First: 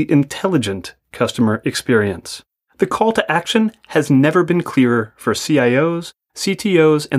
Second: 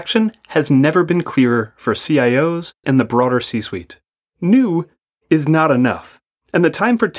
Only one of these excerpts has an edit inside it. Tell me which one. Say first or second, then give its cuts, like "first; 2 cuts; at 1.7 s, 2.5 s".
second; 1 cut; at 2.8 s